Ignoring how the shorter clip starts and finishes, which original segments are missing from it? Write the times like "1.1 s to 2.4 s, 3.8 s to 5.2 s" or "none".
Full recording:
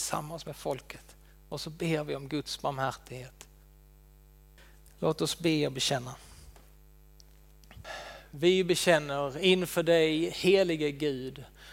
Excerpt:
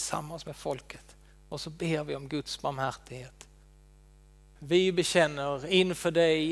4.6 s to 8.3 s